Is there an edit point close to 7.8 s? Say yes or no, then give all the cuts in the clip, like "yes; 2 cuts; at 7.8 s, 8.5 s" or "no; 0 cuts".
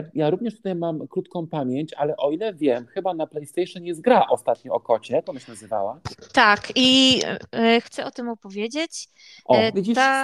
yes; 1 cut; at 7.8 s